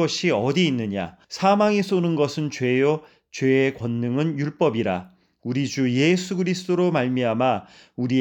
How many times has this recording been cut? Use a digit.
1